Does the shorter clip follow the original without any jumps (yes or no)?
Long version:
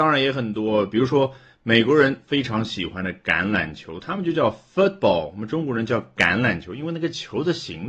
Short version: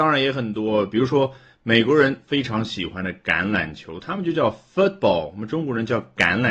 yes